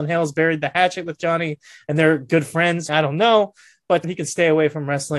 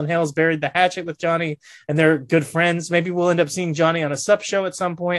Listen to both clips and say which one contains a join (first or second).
first